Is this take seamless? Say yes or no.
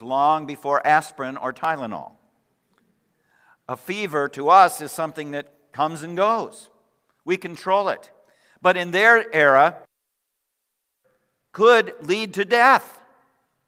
yes